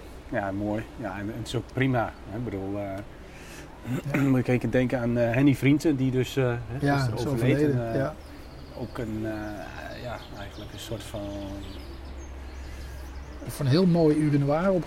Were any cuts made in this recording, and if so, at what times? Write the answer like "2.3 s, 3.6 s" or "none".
13.5 s